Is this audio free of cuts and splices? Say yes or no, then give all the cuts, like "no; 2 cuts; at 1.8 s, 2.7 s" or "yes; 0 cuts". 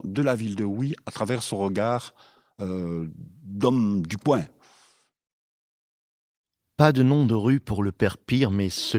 yes; 0 cuts